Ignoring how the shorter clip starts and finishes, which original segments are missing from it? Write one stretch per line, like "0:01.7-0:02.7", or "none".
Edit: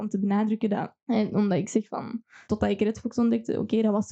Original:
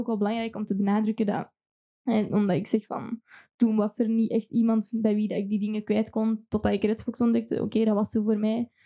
0:01.6-0:02.0
0:03.4-0:06.5